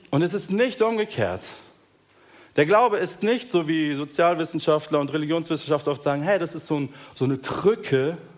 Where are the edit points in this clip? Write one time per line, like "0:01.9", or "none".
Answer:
none